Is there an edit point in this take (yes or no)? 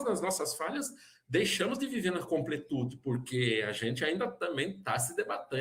no